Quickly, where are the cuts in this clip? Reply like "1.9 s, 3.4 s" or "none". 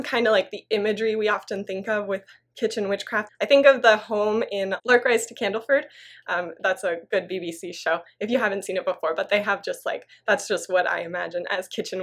3.3 s